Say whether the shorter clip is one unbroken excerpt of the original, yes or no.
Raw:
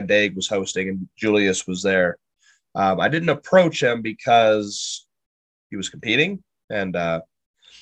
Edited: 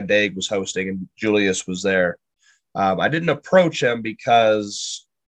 yes